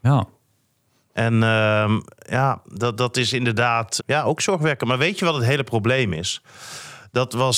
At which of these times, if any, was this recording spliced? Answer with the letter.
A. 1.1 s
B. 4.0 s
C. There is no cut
B